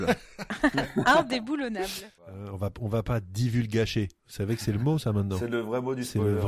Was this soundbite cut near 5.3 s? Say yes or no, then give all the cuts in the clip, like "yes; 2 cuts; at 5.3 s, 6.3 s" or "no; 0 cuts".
no; 1 cut; at 2.2 s